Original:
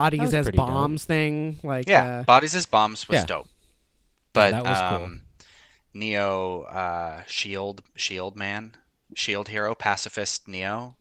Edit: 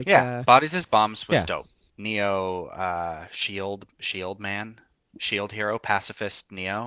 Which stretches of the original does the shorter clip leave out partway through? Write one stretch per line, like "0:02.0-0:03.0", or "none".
0:03.7-0:05.9